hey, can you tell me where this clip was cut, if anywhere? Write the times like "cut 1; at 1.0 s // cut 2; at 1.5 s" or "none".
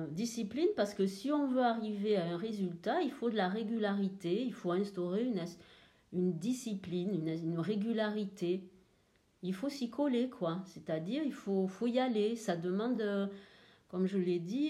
none